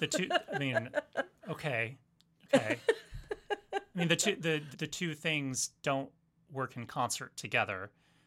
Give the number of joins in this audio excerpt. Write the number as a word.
one